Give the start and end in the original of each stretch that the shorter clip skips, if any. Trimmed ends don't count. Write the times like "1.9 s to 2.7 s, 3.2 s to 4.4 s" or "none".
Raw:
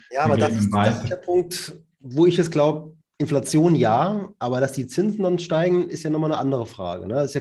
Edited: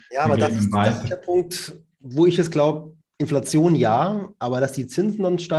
none